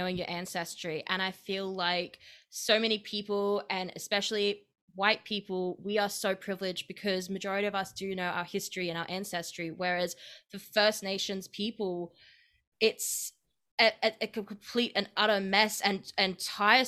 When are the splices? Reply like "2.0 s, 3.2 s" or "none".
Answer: none